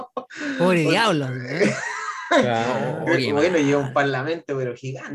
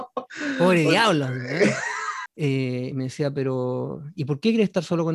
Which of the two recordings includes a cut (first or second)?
second